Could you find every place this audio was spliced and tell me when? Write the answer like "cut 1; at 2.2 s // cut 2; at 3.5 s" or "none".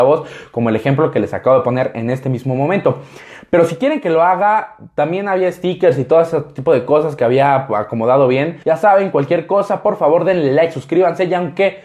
cut 1; at 8.6 s